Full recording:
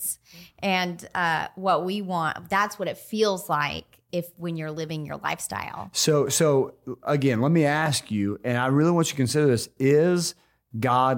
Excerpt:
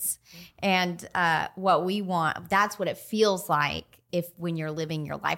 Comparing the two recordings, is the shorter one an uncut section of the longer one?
yes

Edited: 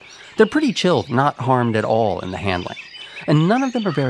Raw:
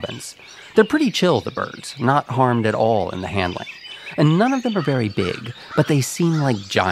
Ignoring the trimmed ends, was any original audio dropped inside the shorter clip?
yes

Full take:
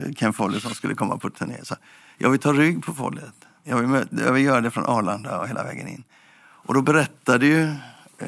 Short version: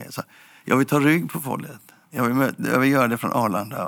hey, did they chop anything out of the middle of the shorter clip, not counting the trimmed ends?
no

